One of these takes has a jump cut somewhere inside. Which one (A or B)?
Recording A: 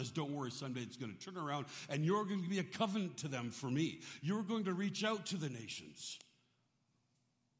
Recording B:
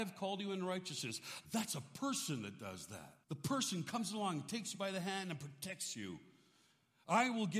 B